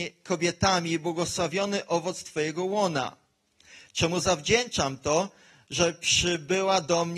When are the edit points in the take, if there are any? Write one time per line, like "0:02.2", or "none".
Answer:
none